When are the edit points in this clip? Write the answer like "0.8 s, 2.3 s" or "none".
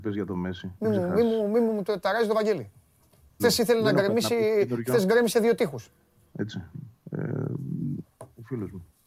3.4 s, 6.3 s, 8.0 s